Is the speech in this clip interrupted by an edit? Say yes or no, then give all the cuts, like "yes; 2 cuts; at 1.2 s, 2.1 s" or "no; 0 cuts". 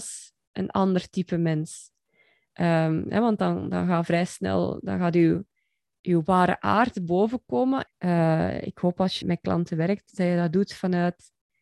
yes; 2 cuts; at 7.9 s, 9.2 s